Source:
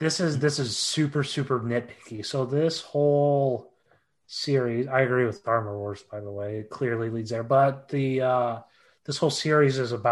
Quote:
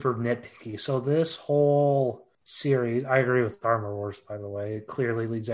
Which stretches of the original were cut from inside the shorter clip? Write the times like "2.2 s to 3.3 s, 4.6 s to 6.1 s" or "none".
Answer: 3.8 s to 4.2 s